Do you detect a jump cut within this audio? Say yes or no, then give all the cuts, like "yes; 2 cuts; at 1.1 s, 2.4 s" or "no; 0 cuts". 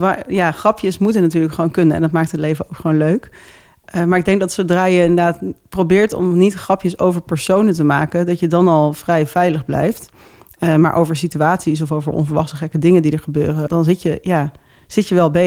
yes; 1 cut; at 13.7 s